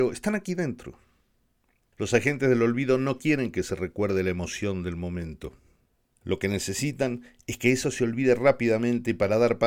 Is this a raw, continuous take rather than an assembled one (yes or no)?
yes